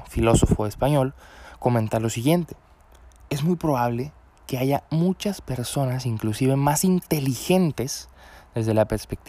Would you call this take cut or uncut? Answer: uncut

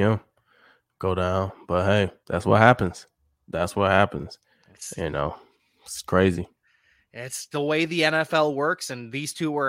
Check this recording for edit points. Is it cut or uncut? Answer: cut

